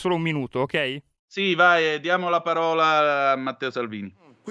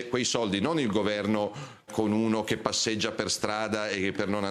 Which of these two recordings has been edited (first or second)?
second